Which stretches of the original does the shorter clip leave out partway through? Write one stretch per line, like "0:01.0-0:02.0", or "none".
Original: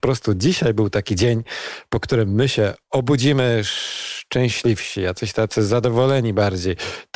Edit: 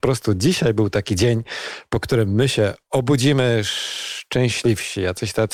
none

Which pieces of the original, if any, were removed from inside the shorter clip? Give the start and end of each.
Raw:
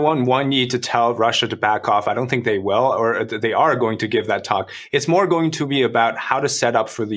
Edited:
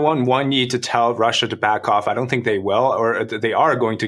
none

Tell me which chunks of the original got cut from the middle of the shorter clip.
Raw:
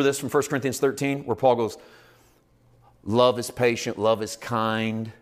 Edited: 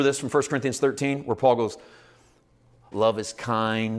0:02.9-0:03.9

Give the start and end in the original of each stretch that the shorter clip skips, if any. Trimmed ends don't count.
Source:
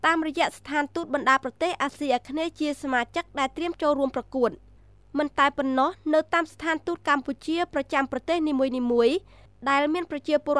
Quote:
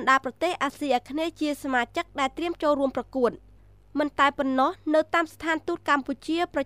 none

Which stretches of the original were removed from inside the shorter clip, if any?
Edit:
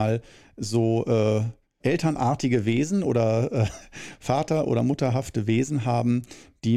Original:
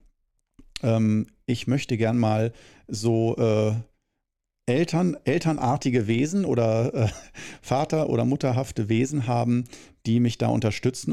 0:04.1-0:05.2

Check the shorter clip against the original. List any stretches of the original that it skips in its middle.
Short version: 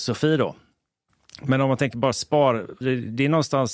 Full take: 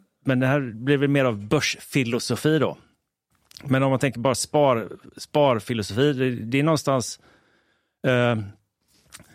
0:05.0-0:06.1

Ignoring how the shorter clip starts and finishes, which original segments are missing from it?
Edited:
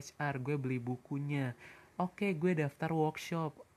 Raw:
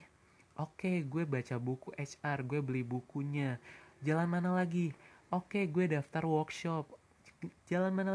0:03.9-0:05.2

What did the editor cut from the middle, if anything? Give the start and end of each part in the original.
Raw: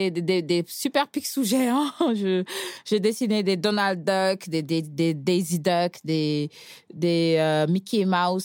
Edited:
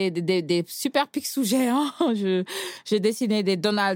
none

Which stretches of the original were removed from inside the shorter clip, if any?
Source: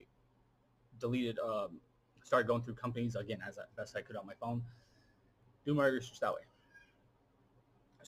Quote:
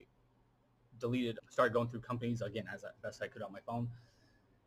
0:01.4-0:02.1

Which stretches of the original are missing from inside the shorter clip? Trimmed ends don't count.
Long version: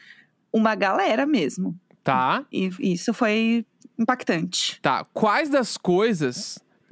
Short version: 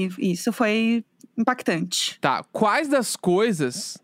none

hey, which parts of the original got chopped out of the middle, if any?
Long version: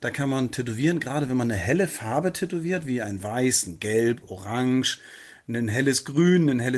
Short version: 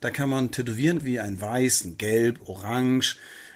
0:01.0-0:02.8

